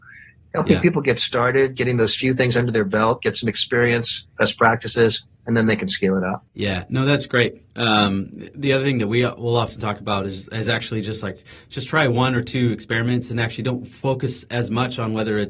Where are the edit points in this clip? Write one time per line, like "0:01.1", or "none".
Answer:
0:06.5